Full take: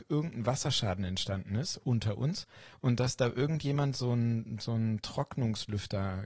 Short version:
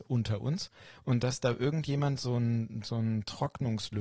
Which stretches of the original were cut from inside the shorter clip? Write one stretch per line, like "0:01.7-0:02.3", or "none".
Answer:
none